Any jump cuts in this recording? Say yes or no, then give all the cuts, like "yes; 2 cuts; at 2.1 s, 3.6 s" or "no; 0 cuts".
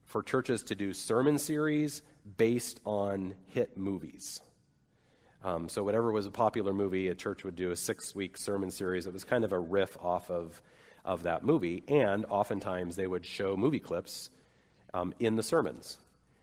no; 0 cuts